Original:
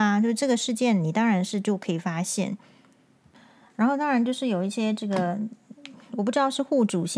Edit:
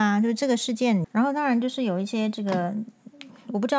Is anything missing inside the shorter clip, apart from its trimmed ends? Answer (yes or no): yes